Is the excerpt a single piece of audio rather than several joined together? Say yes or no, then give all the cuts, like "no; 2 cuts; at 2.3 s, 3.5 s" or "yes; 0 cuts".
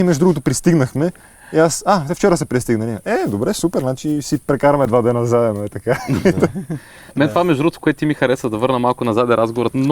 yes; 0 cuts